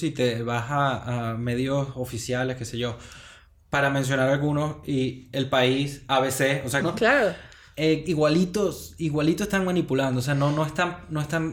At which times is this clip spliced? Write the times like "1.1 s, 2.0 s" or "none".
6.8 s